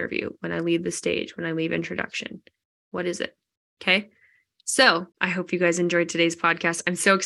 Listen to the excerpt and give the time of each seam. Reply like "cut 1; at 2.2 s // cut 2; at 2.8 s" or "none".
cut 1; at 3.7 s // cut 2; at 5.1 s